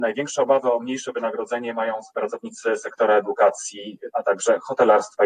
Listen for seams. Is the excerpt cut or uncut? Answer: cut